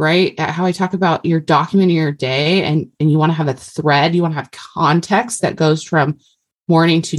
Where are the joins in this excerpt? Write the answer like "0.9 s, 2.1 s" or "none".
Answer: none